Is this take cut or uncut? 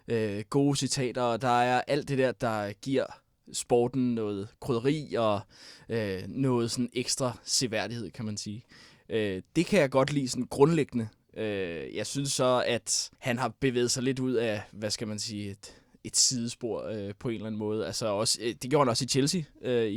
cut